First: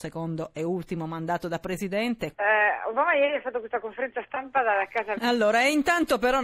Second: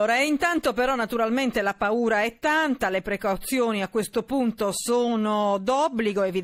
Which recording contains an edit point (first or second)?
first